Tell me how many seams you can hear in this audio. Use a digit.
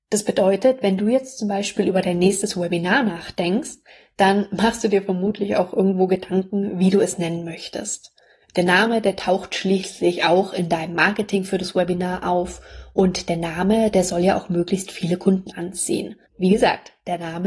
1